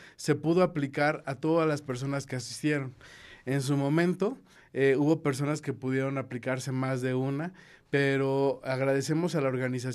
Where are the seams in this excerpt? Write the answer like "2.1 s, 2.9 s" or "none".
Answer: none